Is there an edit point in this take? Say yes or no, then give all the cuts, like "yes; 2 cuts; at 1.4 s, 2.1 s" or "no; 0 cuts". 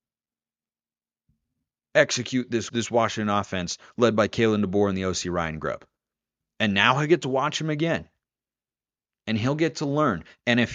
yes; 1 cut; at 2.7 s